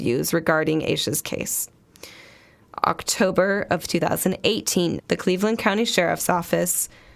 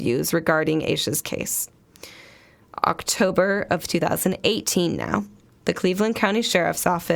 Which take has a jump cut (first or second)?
first